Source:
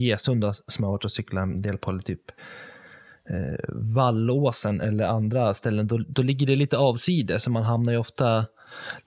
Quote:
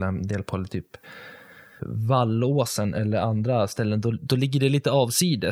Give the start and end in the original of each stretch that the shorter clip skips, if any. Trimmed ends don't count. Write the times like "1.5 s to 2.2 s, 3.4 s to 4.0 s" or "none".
3.1 s to 3.7 s